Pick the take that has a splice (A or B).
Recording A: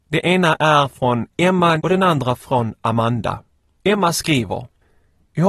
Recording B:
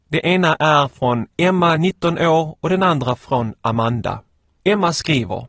A